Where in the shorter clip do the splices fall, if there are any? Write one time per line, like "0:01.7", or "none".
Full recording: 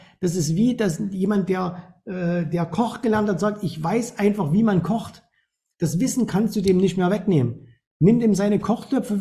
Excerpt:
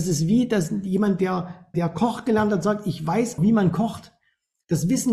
0:01.7
0:03.4